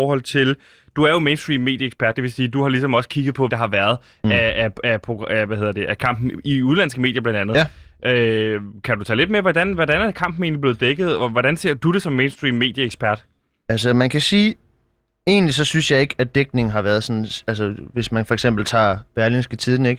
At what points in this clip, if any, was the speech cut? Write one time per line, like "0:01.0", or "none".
0:03.5